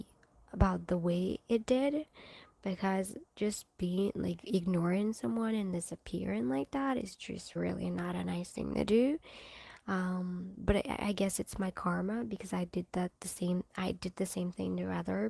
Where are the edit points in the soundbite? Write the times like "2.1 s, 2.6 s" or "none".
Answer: 7.6 s